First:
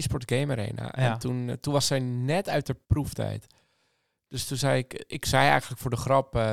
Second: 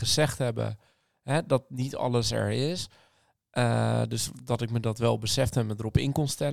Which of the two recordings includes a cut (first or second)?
first